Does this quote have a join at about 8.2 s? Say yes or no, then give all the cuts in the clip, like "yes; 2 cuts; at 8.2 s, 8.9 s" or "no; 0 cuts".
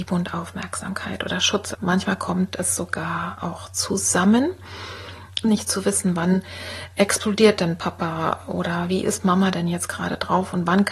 no; 2 cuts; at 1.7 s, 5.4 s